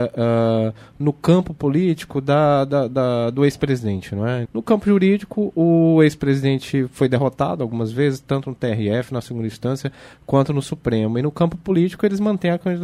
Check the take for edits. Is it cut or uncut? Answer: cut